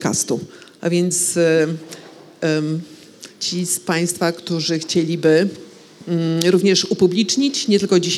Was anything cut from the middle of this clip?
yes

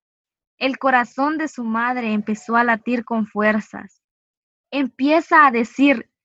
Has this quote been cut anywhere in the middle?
yes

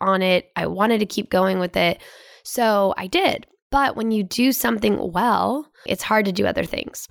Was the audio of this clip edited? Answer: yes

